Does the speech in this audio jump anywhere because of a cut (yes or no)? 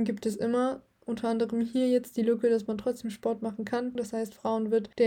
yes